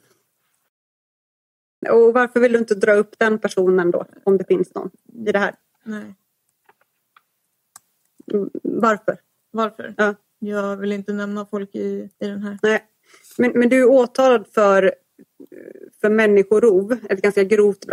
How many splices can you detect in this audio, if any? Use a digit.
2